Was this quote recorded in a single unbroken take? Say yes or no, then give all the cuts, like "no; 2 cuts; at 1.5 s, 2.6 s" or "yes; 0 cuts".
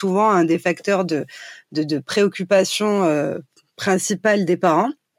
yes; 0 cuts